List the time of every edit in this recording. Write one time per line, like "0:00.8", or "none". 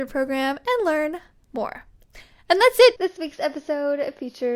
0:03.0